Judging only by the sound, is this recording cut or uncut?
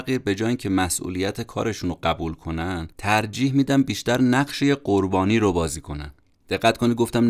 cut